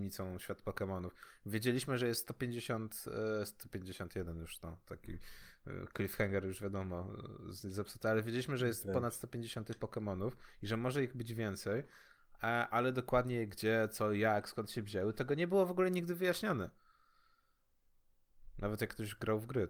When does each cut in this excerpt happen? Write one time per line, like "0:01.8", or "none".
none